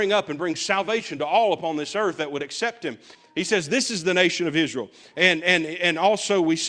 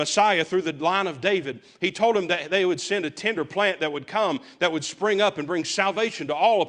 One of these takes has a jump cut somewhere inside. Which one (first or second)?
first